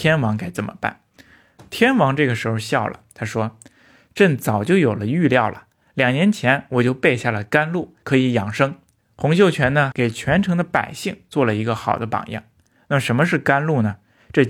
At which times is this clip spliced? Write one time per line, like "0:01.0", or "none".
0:08.0
0:09.9